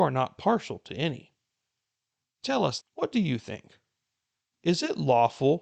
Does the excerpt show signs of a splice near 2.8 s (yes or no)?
yes